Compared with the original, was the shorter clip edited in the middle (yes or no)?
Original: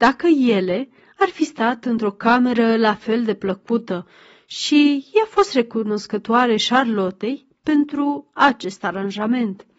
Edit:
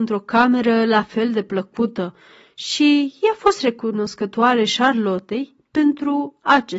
no